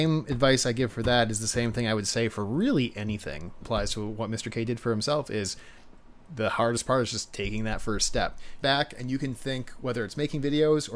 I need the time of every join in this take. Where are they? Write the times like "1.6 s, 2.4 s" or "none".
3.6 s, 8.6 s